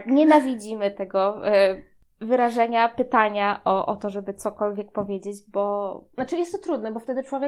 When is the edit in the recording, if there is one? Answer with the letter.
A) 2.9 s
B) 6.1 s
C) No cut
C